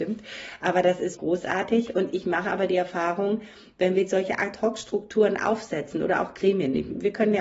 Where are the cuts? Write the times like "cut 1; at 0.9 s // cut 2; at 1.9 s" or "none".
cut 1; at 1.1 s